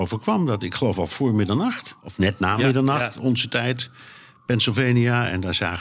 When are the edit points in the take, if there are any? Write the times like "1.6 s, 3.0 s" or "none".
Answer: 2.0 s